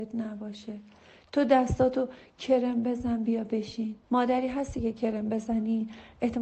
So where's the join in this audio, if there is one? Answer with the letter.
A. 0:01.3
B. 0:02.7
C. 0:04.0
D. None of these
C